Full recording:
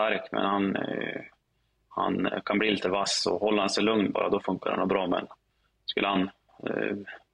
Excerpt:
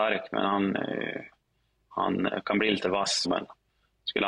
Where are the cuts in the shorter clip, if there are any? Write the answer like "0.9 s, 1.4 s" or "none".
3.2 s